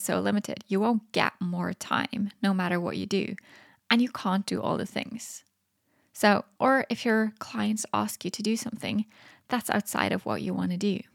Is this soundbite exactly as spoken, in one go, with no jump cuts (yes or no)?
no